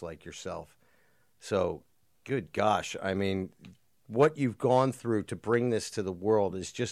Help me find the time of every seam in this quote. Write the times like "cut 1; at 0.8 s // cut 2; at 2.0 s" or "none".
none